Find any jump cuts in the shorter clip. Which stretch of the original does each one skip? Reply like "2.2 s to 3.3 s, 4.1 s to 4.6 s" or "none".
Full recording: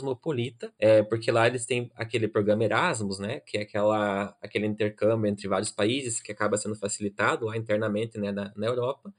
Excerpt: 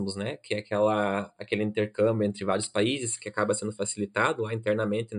none